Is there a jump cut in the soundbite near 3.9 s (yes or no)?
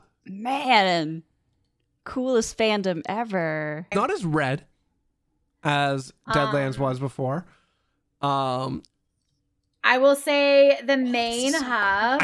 yes